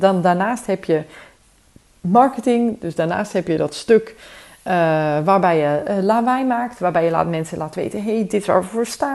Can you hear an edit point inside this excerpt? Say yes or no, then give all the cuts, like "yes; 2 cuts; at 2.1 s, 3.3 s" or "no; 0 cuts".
no; 0 cuts